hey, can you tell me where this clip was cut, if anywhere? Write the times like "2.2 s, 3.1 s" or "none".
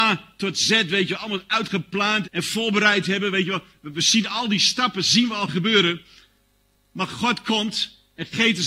2.2 s